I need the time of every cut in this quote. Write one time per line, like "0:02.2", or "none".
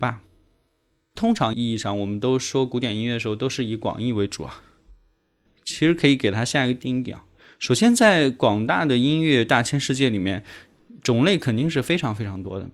none